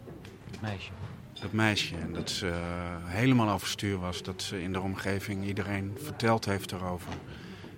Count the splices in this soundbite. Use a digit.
0